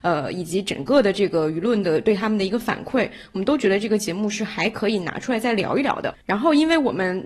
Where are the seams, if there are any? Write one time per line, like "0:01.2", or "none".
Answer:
0:06.2